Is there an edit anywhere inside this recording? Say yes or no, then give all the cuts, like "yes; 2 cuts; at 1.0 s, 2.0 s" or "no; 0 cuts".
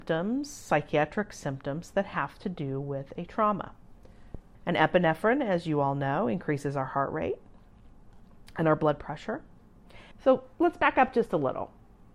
yes; 2 cuts; at 4.5 s, 10.1 s